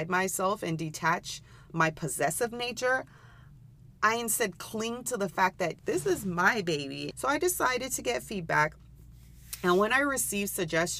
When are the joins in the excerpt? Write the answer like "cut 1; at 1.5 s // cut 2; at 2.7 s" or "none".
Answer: cut 1; at 5.8 s // cut 2; at 7.1 s